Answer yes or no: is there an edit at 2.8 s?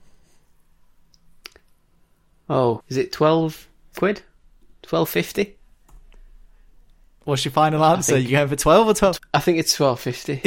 yes